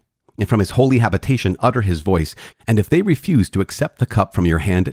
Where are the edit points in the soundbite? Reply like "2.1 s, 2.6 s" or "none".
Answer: 2.5 s